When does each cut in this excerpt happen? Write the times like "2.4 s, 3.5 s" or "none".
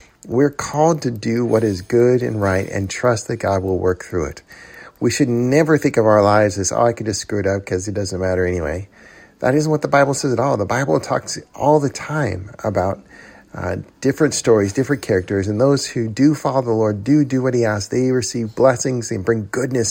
none